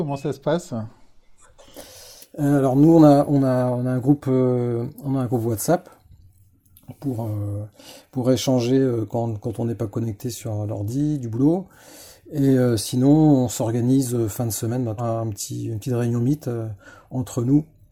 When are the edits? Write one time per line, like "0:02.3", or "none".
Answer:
0:15.0